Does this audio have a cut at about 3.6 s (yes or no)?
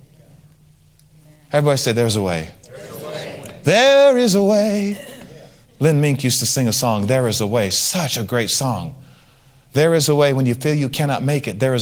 no